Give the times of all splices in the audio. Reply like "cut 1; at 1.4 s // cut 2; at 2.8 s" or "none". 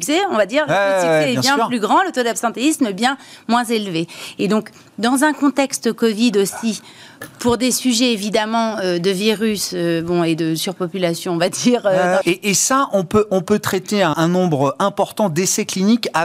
cut 1; at 12.2 s // cut 2; at 14.1 s